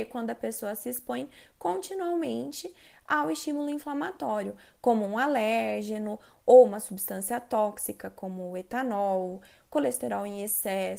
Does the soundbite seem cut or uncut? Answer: uncut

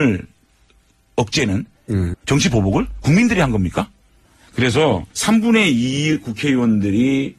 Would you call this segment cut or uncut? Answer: cut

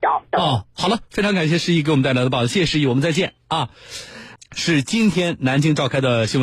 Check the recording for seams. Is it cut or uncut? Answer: cut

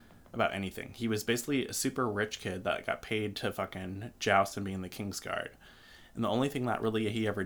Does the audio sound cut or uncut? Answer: uncut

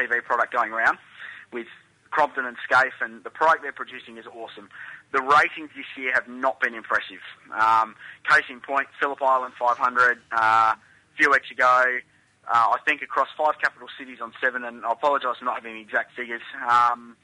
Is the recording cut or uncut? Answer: uncut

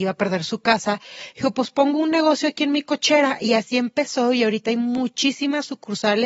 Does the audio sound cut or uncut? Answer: uncut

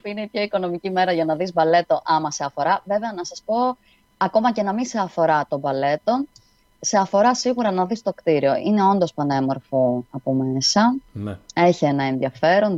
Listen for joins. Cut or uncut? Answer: uncut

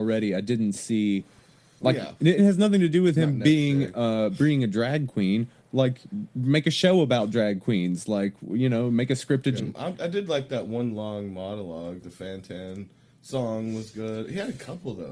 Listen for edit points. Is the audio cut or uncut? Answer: cut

